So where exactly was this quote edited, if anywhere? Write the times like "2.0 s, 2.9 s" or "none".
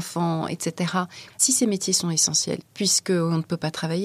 1.3 s, 2.6 s